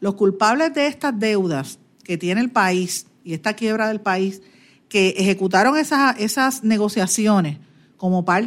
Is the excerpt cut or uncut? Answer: uncut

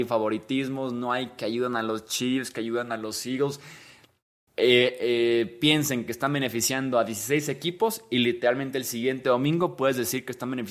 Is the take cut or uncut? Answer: cut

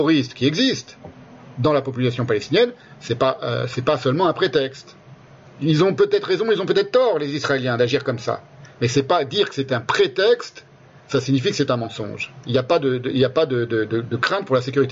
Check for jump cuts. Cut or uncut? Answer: uncut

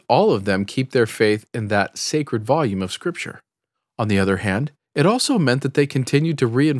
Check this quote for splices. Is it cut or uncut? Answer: uncut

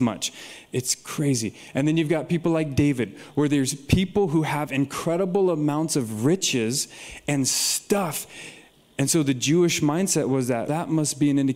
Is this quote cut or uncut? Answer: cut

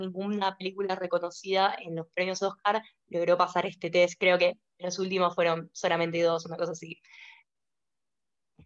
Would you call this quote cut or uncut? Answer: uncut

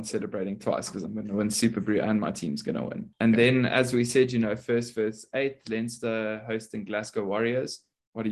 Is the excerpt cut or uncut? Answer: uncut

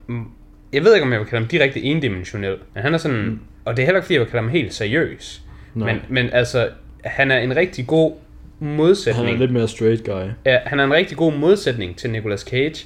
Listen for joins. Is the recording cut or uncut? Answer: cut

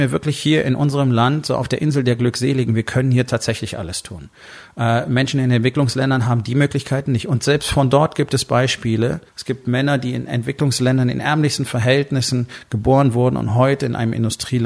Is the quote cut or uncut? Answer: cut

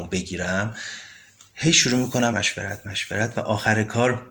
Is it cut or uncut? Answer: cut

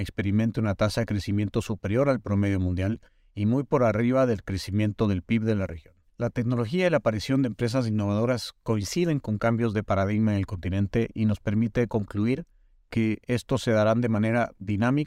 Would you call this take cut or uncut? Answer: uncut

